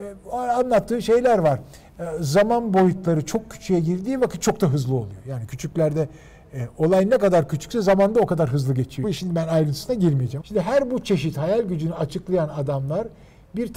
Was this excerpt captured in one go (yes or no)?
no